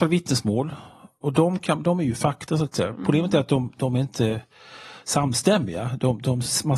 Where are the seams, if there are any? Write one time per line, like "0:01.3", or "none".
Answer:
none